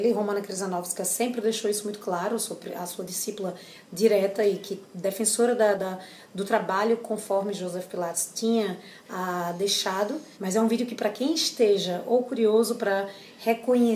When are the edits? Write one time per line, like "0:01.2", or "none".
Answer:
0:05.7
0:10.3